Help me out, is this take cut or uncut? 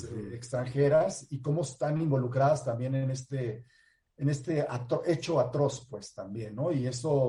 uncut